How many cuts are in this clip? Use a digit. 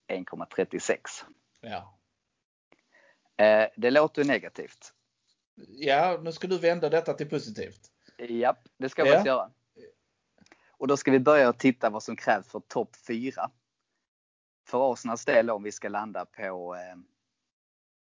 0